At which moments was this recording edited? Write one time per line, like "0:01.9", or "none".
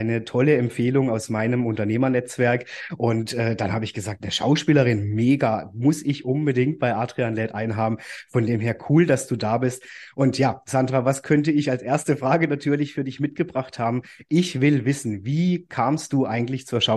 none